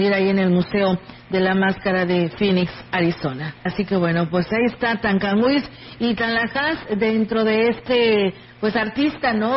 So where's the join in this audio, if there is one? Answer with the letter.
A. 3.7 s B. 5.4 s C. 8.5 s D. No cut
A